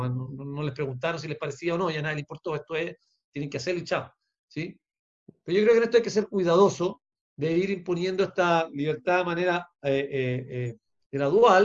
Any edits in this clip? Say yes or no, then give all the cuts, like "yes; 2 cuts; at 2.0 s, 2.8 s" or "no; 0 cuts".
no; 0 cuts